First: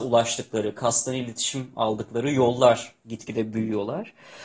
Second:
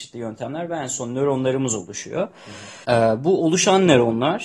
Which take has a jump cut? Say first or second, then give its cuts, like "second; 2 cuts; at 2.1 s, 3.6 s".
second; 1 cut; at 2.8 s